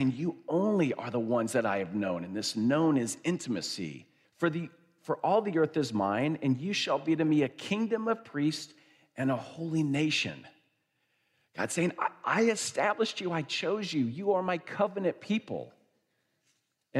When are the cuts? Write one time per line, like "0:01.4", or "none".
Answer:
0:04.2